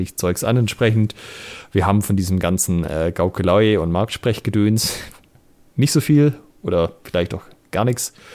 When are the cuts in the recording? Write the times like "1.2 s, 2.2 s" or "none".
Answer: none